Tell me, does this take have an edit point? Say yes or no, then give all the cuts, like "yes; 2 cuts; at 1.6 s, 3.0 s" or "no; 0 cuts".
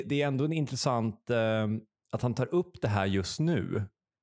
no; 0 cuts